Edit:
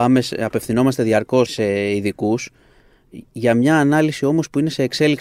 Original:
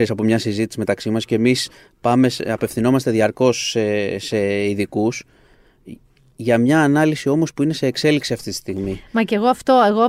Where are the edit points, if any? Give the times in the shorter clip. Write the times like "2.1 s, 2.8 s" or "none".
1.5 s, 3.3 s